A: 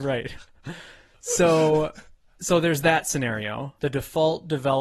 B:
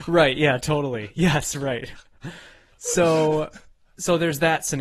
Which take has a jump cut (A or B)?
A